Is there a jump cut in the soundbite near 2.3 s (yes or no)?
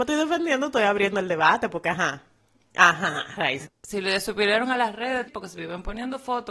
no